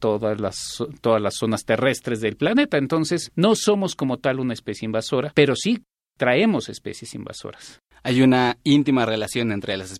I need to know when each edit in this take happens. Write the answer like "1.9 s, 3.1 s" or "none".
none